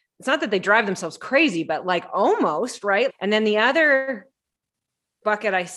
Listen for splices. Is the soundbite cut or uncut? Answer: cut